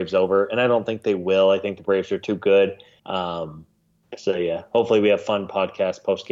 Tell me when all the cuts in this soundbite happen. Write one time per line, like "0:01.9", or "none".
0:03.0